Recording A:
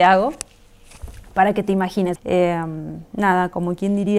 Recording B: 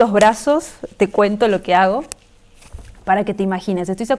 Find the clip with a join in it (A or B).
A